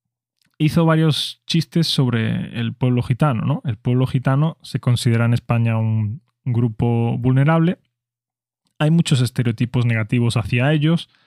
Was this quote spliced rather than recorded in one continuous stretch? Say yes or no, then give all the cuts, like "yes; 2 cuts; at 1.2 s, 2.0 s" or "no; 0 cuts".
no; 0 cuts